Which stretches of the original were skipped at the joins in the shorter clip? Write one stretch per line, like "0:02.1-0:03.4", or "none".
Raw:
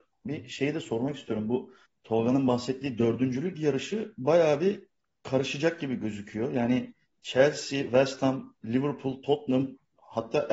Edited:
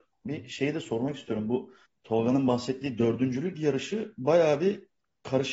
none